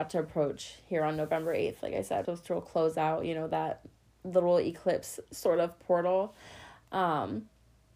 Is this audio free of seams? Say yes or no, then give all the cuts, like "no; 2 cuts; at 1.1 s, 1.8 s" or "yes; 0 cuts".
no; 1 cut; at 2.2 s